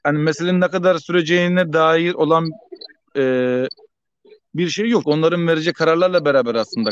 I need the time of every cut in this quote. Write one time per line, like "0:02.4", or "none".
0:05.0